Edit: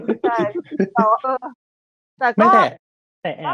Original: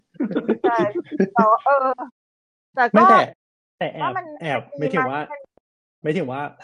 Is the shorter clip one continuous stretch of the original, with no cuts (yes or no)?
no